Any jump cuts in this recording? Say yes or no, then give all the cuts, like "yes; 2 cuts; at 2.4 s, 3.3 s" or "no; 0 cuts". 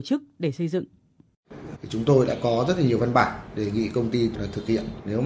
yes; 1 cut; at 1.7 s